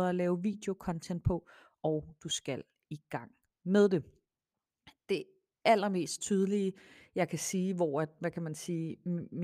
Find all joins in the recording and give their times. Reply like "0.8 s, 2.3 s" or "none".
none